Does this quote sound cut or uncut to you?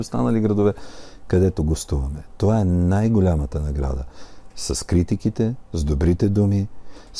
uncut